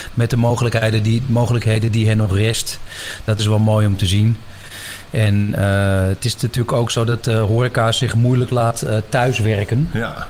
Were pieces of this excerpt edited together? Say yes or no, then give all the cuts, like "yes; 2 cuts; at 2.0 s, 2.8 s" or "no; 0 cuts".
no; 0 cuts